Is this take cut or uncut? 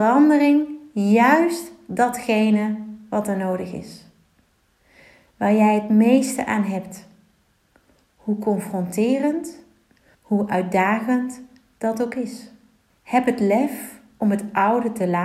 cut